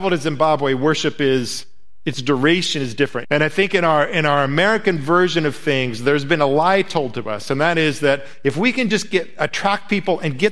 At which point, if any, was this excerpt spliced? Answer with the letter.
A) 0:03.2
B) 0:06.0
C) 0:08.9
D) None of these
A